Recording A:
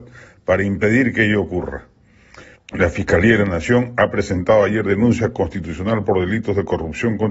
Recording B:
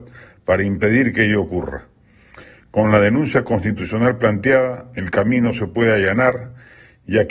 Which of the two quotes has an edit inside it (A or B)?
A